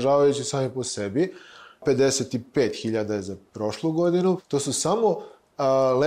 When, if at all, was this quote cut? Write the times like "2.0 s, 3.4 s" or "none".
none